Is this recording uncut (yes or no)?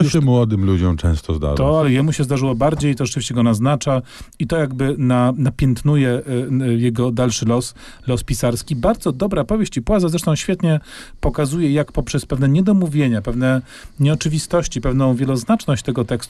yes